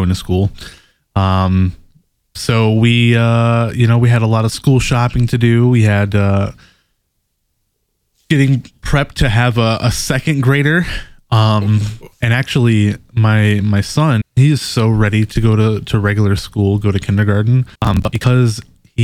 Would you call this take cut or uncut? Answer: cut